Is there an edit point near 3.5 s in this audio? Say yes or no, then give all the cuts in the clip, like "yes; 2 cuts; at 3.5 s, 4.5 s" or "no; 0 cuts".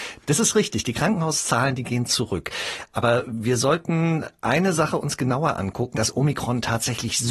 no; 1 cut; at 5.9 s